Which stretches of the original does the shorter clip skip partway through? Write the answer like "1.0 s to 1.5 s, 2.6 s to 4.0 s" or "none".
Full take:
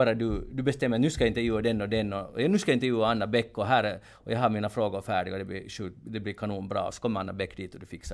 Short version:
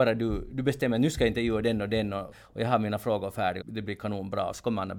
2.3 s to 4.0 s, 5.3 s to 6.0 s